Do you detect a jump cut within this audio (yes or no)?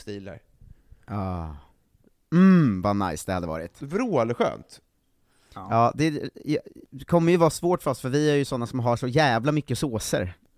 no